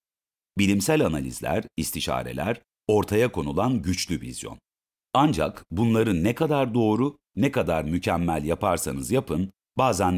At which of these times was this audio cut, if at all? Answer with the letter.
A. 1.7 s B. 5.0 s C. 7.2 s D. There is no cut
B